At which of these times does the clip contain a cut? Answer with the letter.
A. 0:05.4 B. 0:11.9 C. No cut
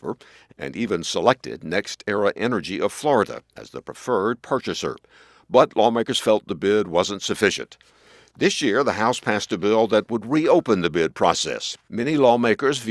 B